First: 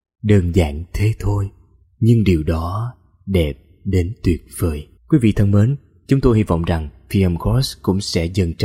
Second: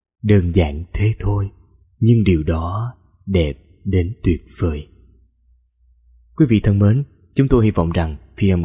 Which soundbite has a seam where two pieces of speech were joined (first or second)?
first